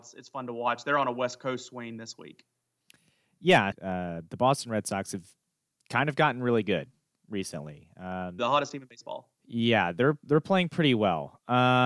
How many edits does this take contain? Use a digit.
2